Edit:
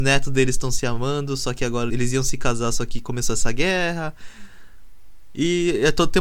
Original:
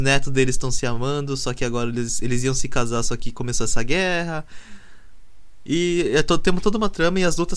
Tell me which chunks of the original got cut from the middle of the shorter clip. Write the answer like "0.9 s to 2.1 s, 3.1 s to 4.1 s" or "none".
1.9 s to 2.2 s